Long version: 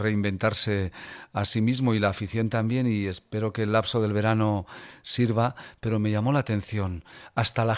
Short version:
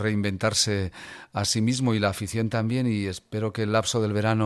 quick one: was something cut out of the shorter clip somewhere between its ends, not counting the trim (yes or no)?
no